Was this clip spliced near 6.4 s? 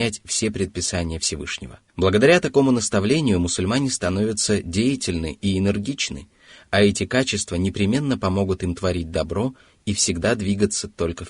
no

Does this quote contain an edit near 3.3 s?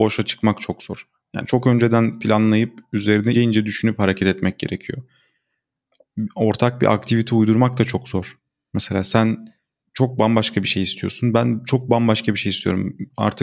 yes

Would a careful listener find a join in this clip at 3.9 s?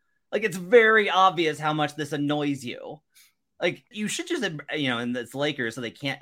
yes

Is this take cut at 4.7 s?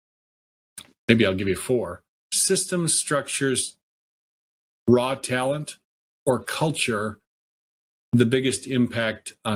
no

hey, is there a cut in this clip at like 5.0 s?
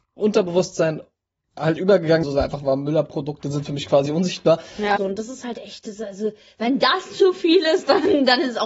yes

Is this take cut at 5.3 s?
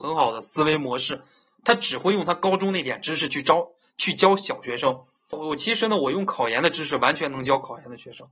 yes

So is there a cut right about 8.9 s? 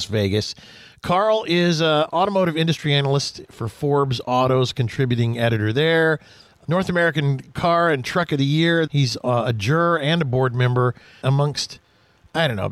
yes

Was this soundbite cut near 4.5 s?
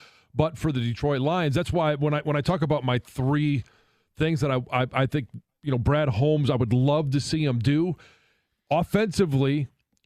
no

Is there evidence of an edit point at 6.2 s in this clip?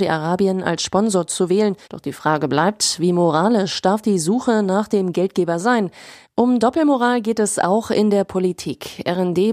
yes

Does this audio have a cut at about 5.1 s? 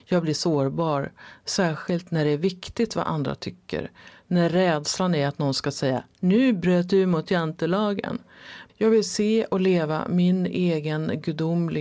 no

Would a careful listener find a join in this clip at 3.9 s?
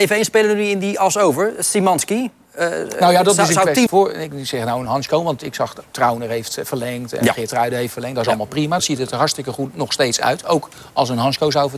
yes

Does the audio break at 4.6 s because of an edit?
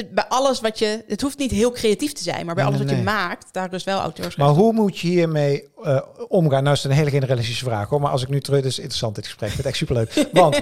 no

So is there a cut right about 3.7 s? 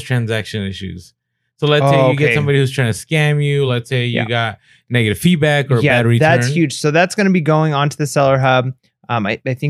no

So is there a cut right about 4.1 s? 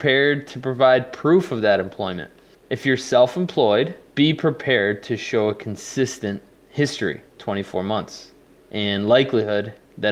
yes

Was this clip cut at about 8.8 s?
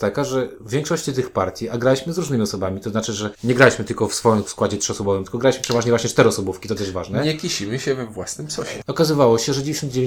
yes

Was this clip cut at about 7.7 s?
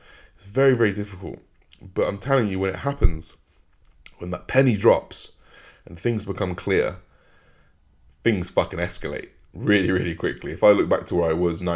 no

